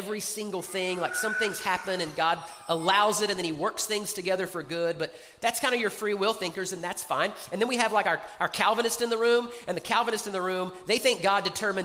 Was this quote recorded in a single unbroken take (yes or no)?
yes